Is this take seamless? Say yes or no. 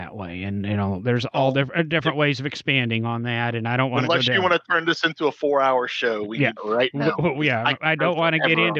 no